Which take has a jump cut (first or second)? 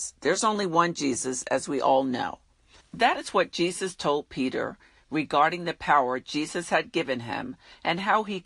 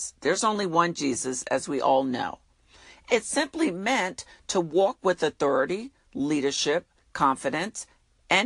first